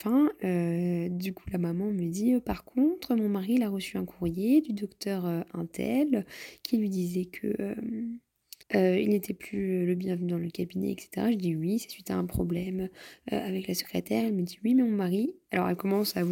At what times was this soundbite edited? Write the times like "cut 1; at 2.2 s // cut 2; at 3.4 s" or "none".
cut 1; at 8.6 s